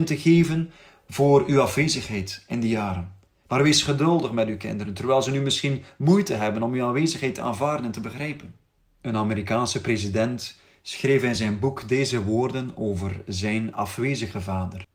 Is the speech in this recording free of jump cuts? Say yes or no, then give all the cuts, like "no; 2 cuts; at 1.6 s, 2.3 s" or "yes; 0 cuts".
yes; 0 cuts